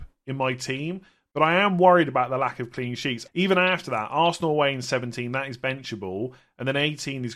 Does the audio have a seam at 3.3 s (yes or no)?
yes